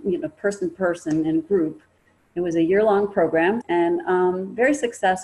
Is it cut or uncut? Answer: cut